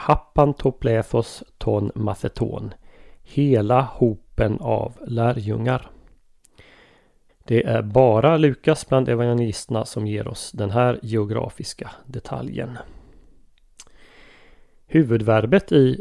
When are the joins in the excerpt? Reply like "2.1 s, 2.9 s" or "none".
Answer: 7.3 s